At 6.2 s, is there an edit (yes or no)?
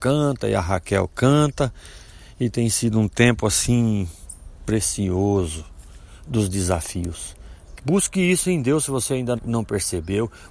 yes